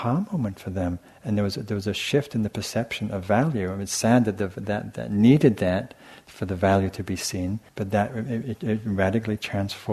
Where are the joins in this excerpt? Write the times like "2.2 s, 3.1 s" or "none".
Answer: 7.7 s